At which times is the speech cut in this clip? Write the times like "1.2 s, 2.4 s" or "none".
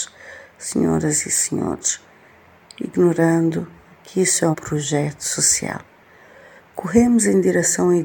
4.5 s